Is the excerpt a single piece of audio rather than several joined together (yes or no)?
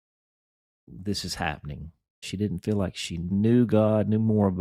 no